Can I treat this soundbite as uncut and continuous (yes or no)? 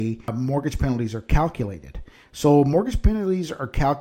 yes